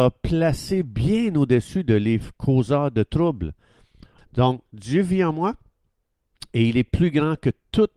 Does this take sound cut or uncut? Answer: cut